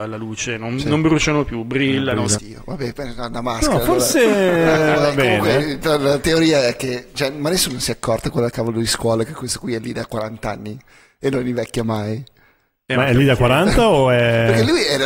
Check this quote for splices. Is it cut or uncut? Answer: cut